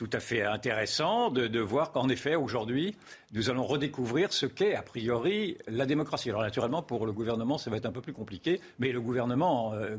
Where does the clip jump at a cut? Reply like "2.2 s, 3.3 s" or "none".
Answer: none